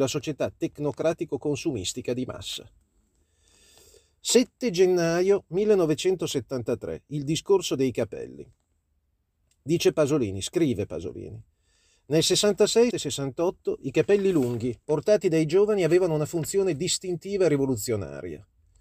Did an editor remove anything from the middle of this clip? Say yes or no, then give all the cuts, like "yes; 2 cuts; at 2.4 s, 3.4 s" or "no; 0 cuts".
yes; 2 cuts; at 12.9 s, 14.8 s